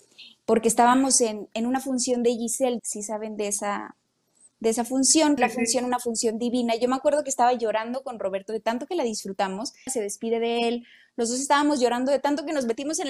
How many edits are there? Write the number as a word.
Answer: three